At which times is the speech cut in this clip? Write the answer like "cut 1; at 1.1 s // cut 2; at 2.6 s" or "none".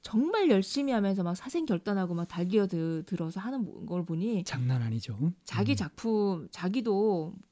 none